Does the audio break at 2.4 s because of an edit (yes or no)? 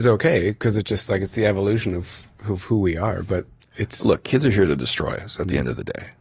yes